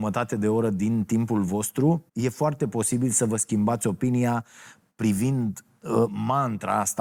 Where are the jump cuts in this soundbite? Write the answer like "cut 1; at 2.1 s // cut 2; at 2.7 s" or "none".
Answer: cut 1; at 2.1 s